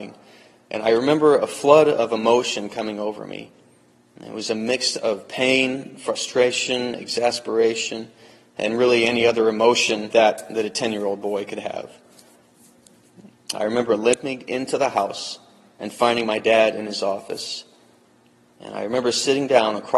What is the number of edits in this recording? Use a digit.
2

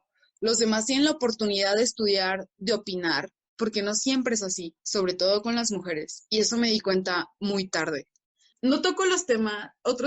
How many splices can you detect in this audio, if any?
2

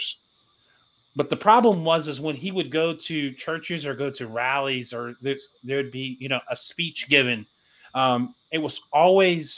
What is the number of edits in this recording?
0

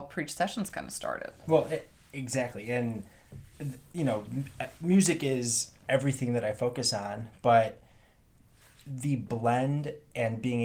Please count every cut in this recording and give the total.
0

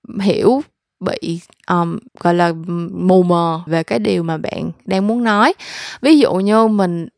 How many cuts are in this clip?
2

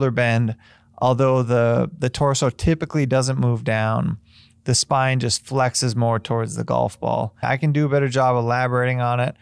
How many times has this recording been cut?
1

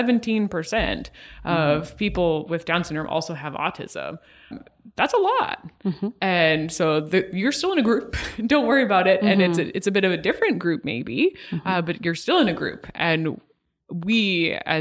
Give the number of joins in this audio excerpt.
1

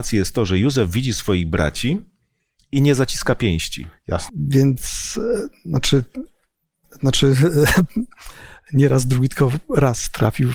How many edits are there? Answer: 1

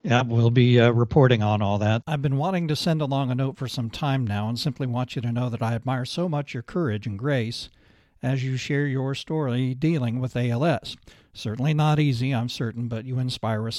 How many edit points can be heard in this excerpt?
1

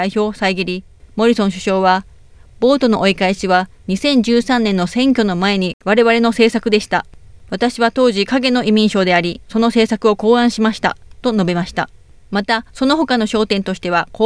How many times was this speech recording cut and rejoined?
0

